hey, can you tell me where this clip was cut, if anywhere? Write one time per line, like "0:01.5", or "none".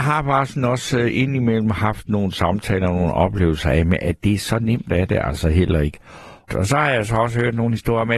0:06.5